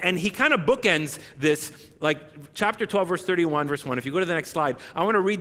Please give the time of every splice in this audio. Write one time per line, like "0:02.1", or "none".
0:03.7